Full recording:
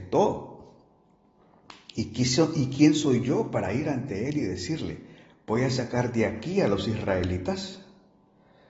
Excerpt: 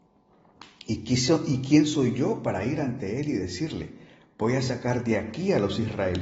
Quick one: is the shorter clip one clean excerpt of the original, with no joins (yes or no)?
yes